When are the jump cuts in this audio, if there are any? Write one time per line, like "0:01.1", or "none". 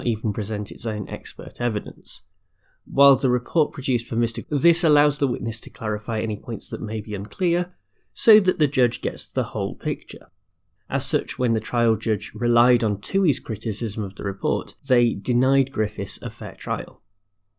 0:04.4
0:10.8
0:14.8